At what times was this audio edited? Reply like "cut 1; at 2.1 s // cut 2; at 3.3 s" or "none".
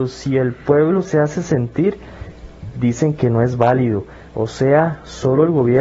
none